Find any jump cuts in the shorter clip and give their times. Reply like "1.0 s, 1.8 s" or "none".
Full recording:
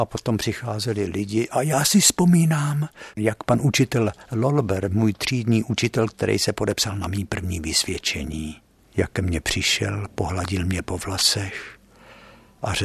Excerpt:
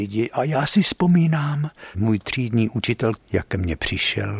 1.9 s, 3.1 s